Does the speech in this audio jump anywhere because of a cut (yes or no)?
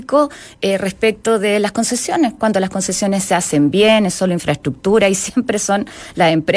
no